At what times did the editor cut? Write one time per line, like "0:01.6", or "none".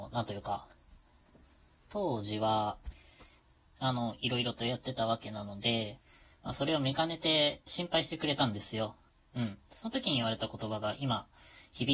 0:03.8
0:07.7

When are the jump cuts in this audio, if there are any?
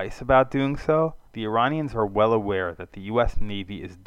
0:01.3

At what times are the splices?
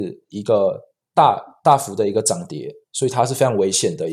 none

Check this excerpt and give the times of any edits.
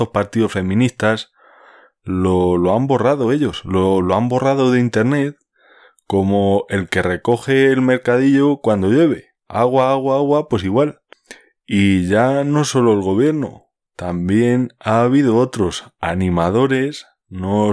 none

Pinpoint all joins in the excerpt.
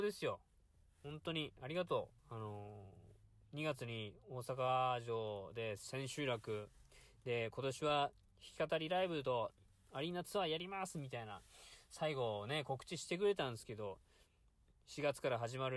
0:02.2

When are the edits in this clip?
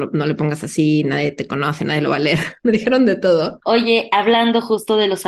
0:03.6

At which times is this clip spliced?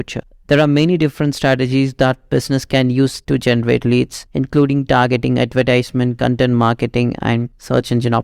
none

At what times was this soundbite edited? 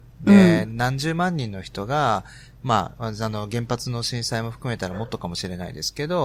none

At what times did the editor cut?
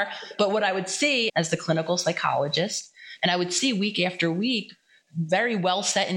0:01.3

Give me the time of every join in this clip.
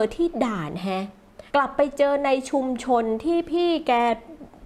0:01.5

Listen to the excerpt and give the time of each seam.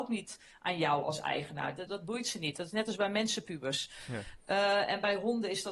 0:01.9

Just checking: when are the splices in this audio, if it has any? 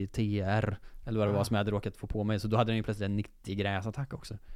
none

